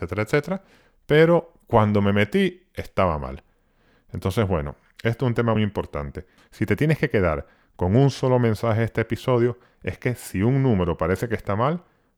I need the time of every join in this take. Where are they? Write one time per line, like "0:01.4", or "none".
0:05.6